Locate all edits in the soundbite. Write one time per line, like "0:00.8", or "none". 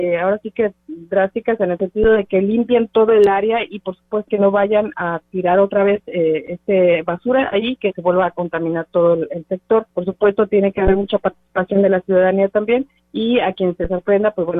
0:04.3
0:09.9